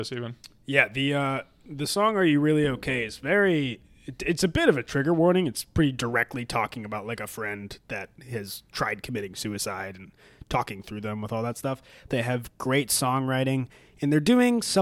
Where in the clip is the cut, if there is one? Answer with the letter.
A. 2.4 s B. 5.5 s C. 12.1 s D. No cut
C